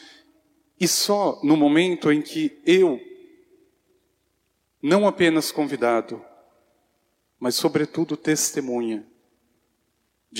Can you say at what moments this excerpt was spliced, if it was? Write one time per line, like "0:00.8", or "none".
none